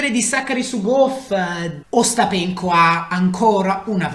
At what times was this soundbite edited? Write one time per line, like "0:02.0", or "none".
0:01.8